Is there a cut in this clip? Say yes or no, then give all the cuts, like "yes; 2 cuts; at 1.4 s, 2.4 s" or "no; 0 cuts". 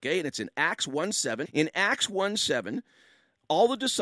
yes; 1 cut; at 1.5 s